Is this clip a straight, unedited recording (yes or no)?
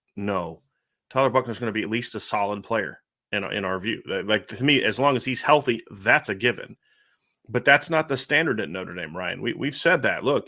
yes